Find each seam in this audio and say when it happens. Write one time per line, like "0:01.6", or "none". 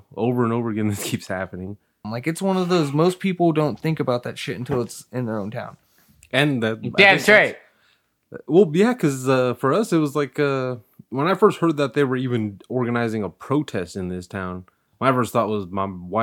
0:02.0